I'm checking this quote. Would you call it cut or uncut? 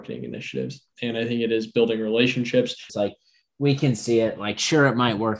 cut